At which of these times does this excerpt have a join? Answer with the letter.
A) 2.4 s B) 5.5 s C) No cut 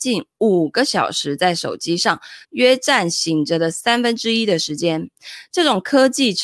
A